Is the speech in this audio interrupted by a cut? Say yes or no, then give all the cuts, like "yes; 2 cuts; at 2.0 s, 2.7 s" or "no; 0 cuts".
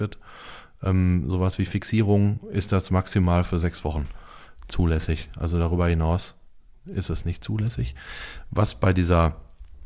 no; 0 cuts